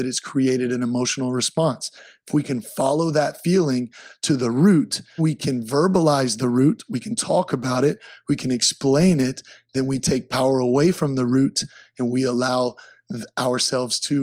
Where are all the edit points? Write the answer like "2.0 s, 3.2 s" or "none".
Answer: 5.2 s

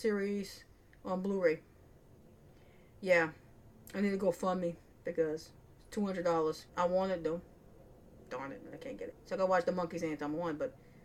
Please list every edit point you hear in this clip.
6.7 s, 9.1 s

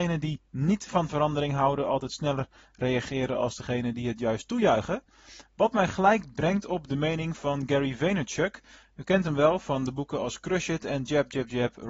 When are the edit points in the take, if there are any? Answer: none

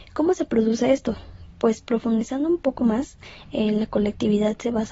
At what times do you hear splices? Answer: none

